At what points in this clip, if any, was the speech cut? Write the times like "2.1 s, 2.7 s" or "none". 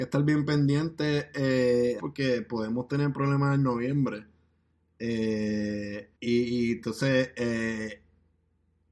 2.0 s, 6.1 s